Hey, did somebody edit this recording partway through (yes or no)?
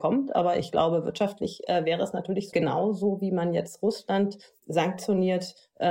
yes